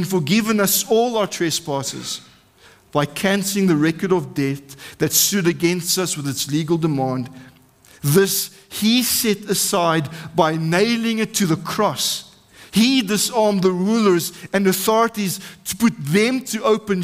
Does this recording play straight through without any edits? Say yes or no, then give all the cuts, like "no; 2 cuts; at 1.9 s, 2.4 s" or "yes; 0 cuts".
yes; 0 cuts